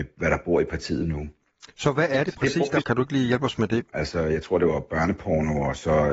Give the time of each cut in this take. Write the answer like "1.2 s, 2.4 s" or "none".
2.8 s, 3.9 s